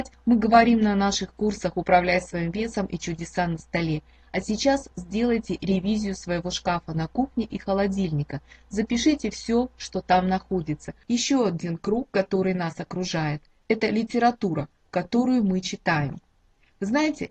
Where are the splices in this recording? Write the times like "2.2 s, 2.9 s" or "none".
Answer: 4.9 s, 11.0 s